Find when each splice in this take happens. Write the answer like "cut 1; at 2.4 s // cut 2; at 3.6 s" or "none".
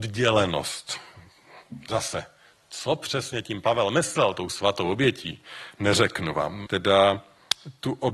cut 1; at 6.7 s